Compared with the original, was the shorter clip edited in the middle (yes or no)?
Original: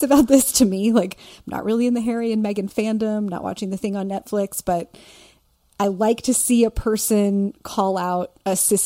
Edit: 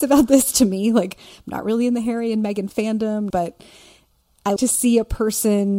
yes